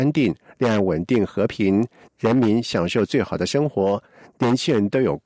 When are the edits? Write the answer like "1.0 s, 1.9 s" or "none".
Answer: 2.1 s